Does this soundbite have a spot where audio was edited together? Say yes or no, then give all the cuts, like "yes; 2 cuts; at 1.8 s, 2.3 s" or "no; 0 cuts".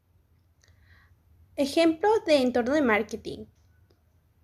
no; 0 cuts